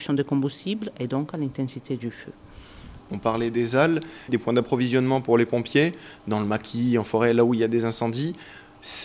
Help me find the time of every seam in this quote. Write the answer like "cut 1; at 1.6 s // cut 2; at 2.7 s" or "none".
cut 1; at 3.0 s // cut 2; at 4.3 s